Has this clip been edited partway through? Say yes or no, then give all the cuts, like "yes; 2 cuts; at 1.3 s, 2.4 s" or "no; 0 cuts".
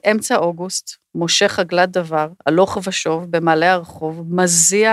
no; 0 cuts